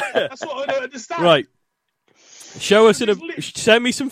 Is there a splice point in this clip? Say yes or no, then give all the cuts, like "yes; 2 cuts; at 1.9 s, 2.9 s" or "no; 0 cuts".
no; 0 cuts